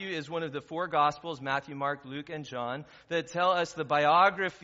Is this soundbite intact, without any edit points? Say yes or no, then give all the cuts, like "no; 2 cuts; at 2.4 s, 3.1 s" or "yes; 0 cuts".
yes; 0 cuts